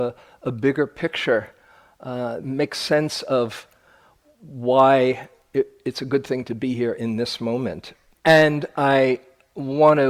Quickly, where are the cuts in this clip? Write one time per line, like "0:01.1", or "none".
0:02.4
0:08.2

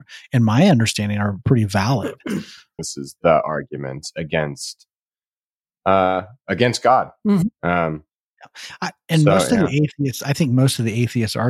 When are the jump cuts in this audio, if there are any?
0:02.8

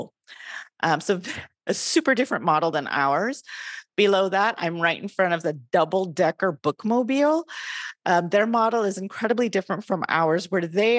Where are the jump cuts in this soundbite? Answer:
none

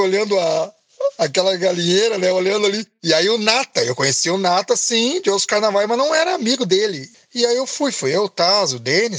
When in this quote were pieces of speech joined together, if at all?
0:07.1

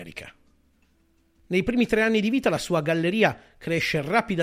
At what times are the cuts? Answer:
none

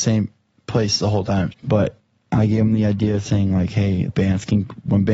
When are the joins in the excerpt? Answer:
0:01.5
0:04.1

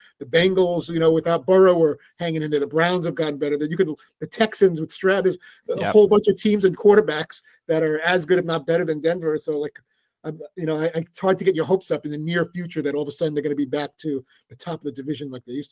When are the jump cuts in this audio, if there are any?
none

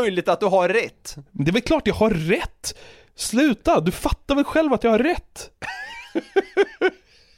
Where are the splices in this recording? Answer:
none

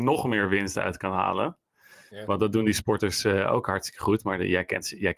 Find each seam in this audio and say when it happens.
none

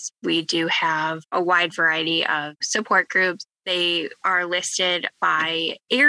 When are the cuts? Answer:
0:03.5

